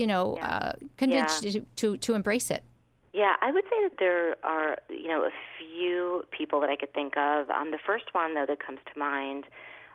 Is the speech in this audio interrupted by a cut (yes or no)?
yes